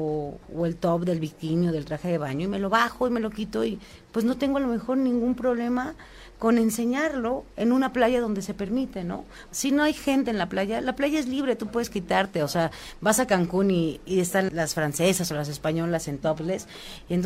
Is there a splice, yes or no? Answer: yes